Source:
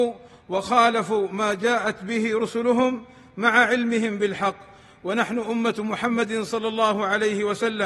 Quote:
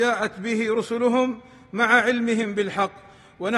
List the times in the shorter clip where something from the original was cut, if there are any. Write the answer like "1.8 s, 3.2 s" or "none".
none